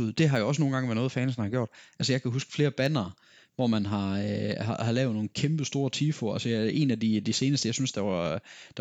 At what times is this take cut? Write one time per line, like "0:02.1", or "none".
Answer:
none